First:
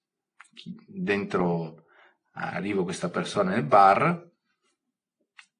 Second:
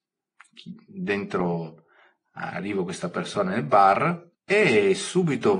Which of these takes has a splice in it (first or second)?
second